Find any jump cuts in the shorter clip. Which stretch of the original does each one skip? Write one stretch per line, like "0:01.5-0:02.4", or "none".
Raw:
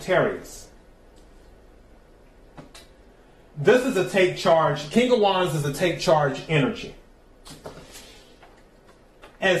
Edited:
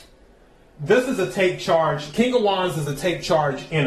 none